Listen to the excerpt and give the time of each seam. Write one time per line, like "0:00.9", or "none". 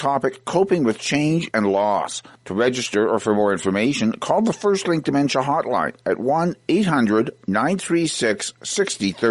0:01.5